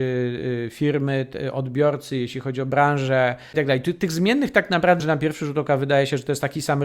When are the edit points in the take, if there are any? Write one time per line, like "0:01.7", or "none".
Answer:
0:03.5
0:05.0